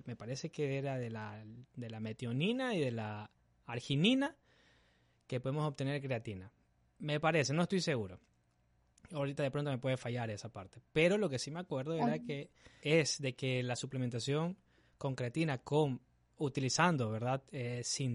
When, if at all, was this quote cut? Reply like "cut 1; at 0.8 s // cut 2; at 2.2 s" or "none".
cut 1; at 12.8 s